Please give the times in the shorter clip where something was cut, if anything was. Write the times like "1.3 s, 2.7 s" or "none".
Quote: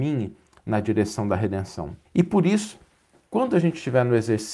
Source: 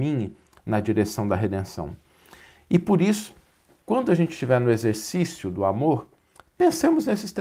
2.1 s